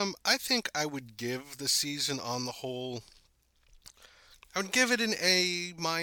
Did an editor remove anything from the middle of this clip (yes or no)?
no